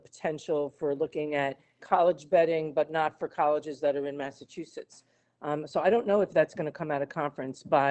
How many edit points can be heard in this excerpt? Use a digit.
1